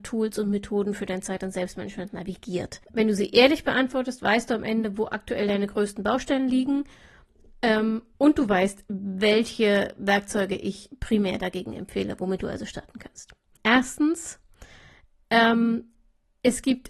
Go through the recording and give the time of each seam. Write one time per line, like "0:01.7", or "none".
0:02.8
0:13.6